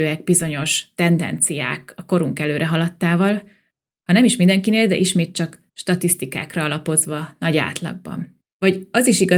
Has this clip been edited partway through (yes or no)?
yes